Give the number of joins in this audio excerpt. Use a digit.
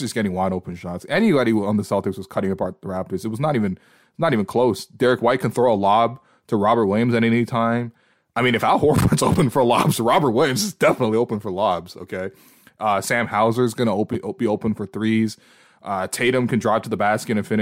0